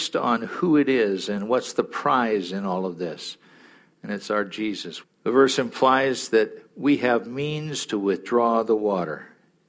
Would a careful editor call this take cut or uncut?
cut